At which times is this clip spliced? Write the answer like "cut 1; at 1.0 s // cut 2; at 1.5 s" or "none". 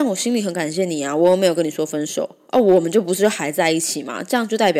none